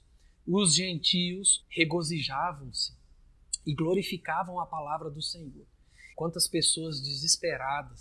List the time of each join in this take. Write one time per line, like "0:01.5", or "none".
0:01.6
0:06.1